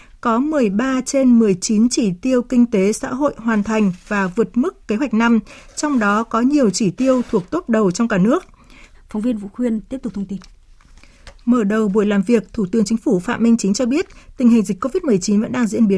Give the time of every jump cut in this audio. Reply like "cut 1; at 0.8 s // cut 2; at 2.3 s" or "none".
cut 1; at 8.9 s